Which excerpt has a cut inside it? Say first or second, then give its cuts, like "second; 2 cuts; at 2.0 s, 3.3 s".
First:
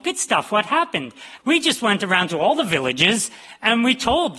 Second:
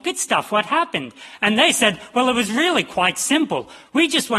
first; 1 cut; at 1.4 s